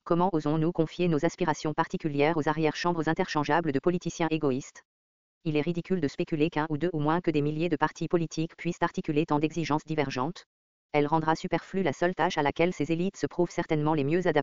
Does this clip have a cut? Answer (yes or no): yes